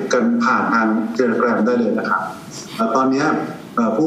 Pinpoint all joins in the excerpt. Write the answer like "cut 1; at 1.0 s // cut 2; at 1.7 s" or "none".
cut 1; at 2.8 s